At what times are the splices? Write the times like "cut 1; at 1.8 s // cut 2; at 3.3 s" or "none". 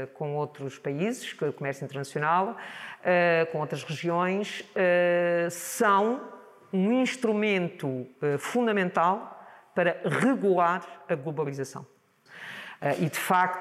cut 1; at 12.3 s